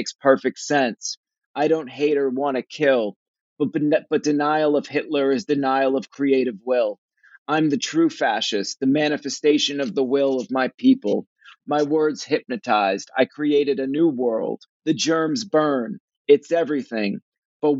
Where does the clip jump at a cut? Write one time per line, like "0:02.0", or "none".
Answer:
0:14.7